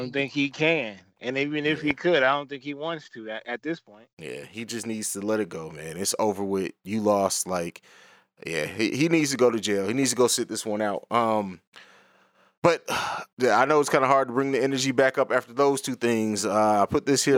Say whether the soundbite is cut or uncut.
uncut